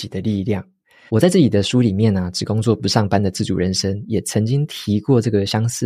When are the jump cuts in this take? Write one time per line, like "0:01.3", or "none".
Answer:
0:01.1